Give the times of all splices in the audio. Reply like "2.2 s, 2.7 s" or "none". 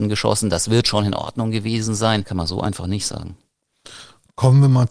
none